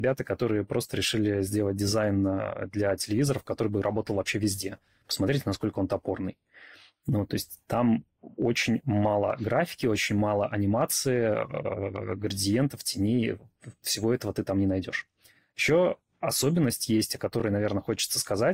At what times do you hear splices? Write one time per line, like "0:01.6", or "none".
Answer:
none